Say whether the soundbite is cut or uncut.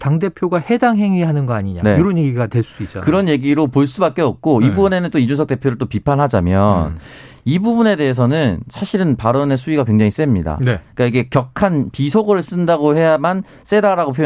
uncut